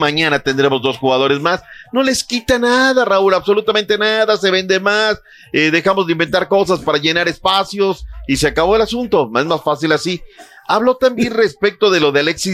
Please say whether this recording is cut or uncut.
uncut